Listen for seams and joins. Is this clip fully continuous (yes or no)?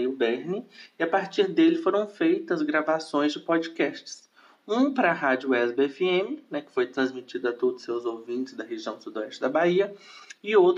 yes